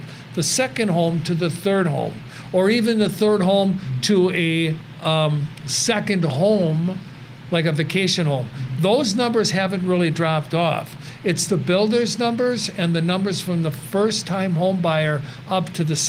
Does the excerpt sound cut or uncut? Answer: uncut